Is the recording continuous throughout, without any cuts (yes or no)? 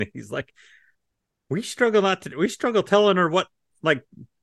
yes